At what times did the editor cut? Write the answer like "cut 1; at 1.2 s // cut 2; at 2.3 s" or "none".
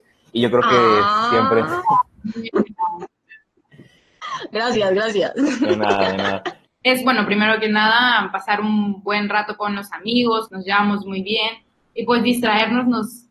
cut 1; at 6.7 s // cut 2; at 10.5 s